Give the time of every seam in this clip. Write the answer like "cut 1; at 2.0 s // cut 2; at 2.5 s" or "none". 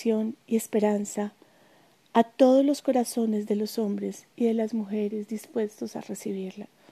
cut 1; at 4.3 s